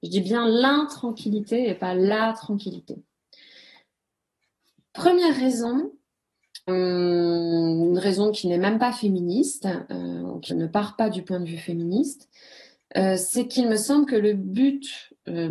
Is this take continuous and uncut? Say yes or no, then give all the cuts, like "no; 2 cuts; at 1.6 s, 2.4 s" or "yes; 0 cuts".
no; 2 cuts; at 6.7 s, 10.5 s